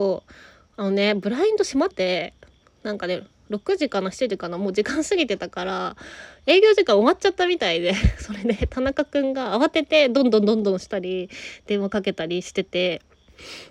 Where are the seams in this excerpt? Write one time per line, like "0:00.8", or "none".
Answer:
0:01.9